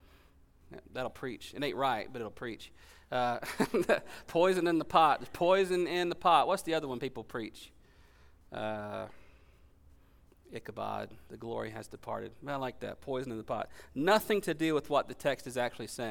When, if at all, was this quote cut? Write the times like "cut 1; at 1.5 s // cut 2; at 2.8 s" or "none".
none